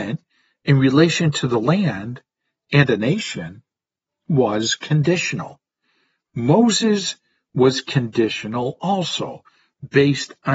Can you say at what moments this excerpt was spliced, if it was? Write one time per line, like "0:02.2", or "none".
none